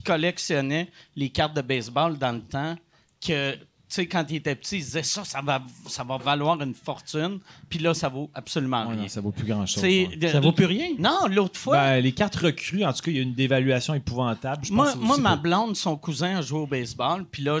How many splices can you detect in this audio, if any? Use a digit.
0